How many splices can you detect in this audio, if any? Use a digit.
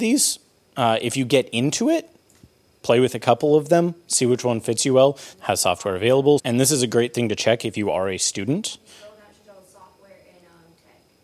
2